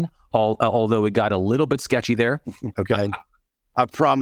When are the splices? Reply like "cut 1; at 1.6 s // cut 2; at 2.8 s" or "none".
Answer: cut 1; at 2.7 s